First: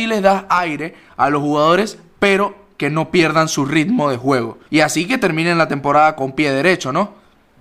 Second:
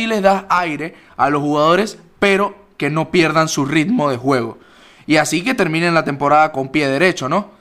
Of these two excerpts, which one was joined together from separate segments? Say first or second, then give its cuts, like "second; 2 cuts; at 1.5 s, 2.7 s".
first; 1 cut; at 4.7 s